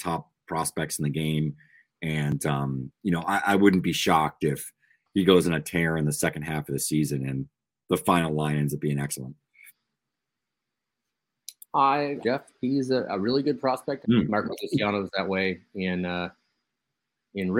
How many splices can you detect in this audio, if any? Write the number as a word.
two